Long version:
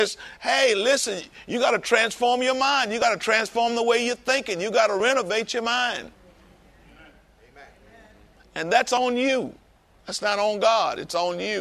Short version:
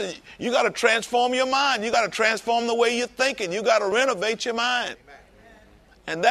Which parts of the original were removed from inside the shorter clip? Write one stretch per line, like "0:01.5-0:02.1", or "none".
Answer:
0:06.0-0:07.4